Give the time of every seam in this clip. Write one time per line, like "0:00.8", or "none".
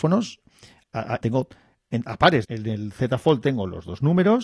0:01.2
0:02.4